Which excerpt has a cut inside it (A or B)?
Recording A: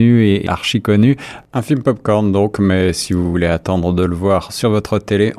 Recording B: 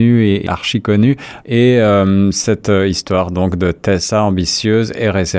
B